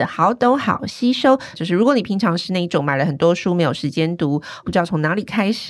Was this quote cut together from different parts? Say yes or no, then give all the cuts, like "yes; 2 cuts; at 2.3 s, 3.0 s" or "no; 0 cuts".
yes; 2 cuts; at 1.5 s, 4.6 s